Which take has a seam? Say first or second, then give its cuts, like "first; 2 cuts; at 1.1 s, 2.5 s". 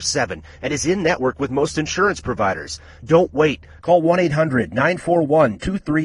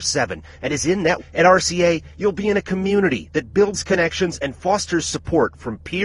second; 1 cut; at 1.2 s